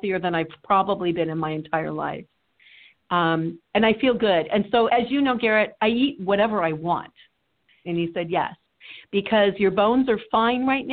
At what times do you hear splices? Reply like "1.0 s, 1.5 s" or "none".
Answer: 4.9 s, 7.8 s